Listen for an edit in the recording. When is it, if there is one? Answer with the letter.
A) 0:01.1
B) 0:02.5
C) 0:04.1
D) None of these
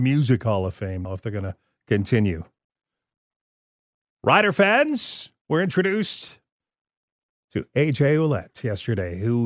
A